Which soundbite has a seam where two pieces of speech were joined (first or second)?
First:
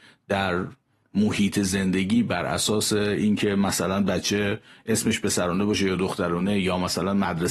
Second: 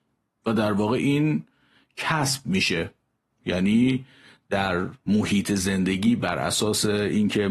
second